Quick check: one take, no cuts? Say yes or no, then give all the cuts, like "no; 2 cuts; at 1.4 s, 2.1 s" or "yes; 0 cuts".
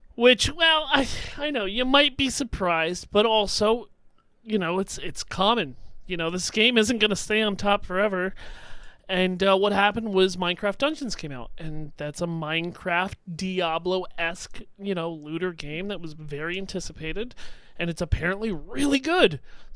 yes; 0 cuts